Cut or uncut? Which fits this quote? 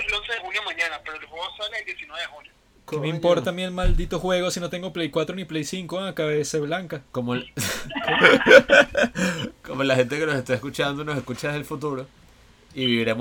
uncut